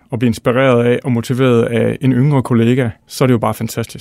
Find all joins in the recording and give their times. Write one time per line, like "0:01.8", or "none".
0:03.0